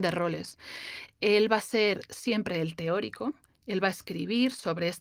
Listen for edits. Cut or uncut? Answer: uncut